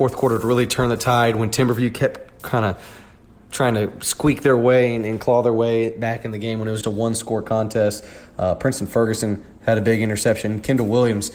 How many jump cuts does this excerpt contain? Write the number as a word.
one